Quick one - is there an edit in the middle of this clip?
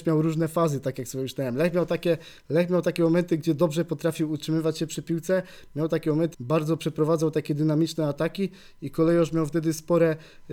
yes; 1 cut; at 6.3 s

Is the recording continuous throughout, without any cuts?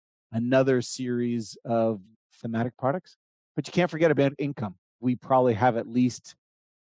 no; 1 cut; at 4.9 s

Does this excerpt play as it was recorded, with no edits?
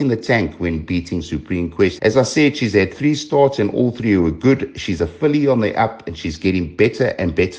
no; 1 cut; at 2.0 s

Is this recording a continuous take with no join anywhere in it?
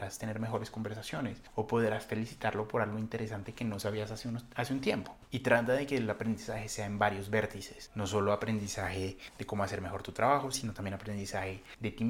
no; 2 cuts; at 5.2 s, 10.5 s

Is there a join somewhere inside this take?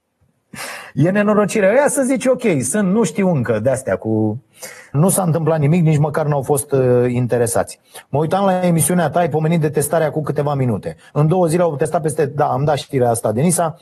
yes; 3 cuts; at 4.9 s, 8.0 s, 11.1 s

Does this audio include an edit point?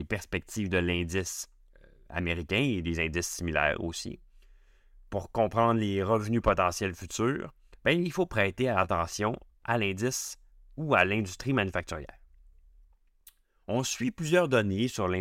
no; 0 cuts

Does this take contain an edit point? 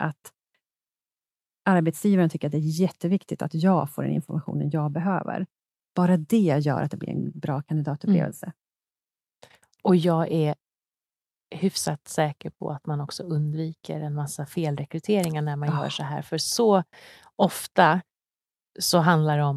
no; 0 cuts

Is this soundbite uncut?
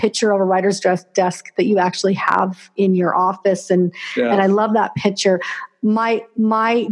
yes; 0 cuts

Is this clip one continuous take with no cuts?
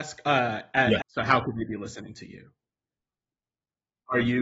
no; 1 cut; at 1.0 s

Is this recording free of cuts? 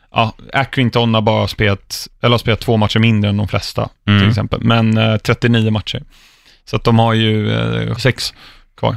no; 1 cut; at 8.0 s

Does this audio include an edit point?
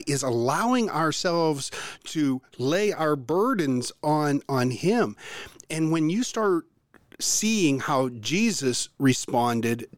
no; 0 cuts

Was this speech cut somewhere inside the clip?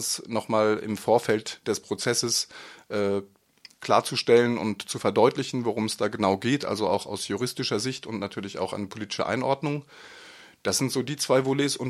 yes; 1 cut; at 3.7 s

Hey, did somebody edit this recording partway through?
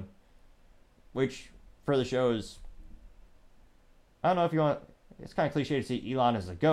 yes; 1 cut; at 1.0 s

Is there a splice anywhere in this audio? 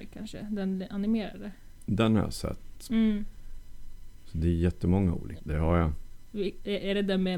yes; 2 cuts; at 2.9 s, 5.4 s

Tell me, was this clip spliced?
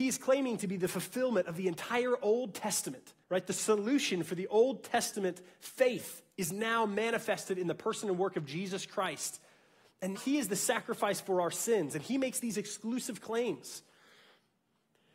yes; 2 cuts; at 3.2 s, 10.1 s

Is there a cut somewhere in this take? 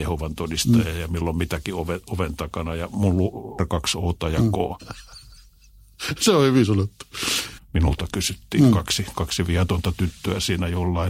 yes; 3 cuts; at 3.6 s, 4.8 s, 7.6 s

